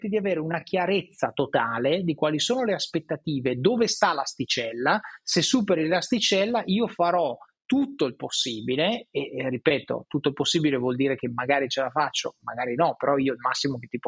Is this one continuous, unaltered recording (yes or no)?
yes